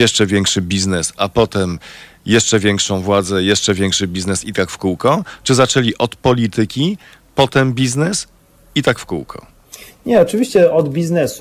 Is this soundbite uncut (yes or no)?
yes